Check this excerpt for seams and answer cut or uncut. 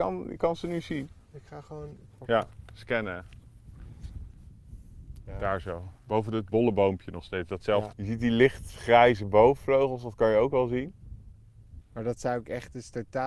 cut